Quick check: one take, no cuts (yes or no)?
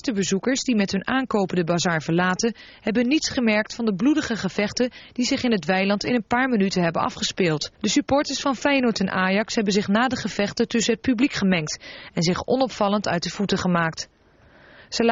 no